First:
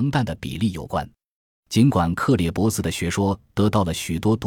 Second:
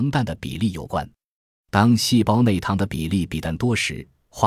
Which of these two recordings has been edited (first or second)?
first